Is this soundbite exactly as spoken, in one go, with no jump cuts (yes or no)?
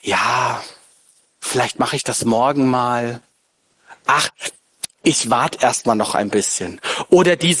yes